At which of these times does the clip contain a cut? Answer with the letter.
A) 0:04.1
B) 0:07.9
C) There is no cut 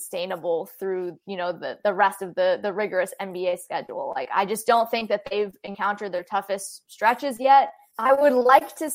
B